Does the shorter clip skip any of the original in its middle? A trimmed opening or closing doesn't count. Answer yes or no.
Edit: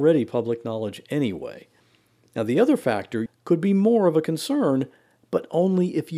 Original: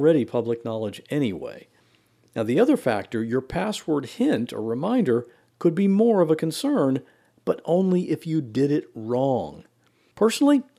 yes